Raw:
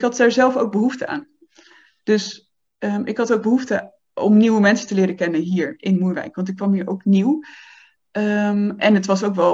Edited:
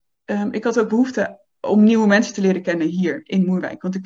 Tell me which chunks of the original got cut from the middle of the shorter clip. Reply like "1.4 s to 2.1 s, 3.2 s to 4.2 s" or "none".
none